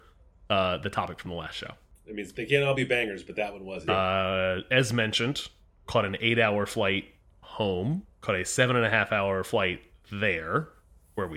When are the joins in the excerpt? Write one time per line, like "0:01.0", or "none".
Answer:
0:03.9